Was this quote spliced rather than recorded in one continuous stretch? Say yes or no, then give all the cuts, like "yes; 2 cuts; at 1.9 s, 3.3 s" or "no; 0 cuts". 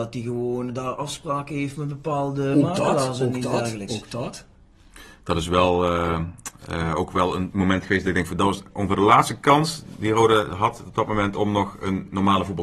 no; 0 cuts